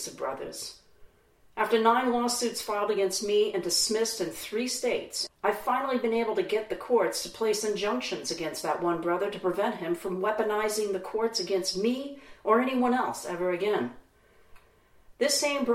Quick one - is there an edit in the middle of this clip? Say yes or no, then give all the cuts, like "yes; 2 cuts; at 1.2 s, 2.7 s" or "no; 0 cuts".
yes; 1 cut; at 5.3 s